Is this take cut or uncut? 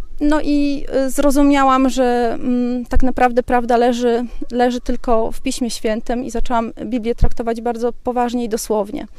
uncut